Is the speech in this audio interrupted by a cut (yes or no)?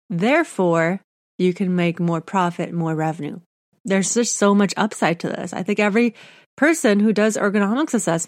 no